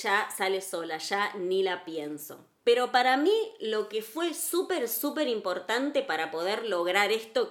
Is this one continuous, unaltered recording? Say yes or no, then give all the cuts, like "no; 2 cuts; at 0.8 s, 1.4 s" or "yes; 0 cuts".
yes; 0 cuts